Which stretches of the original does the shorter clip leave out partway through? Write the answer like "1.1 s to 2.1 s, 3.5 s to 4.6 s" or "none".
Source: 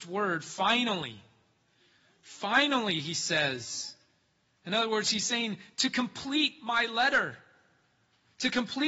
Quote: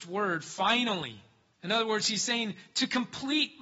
1.5 s to 4.5 s